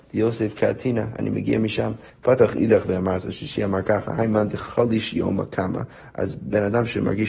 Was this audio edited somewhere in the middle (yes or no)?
yes